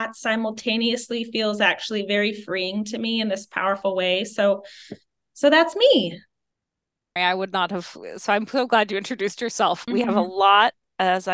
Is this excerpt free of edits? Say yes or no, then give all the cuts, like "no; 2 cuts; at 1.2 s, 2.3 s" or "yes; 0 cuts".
no; 2 cuts; at 7.2 s, 9.9 s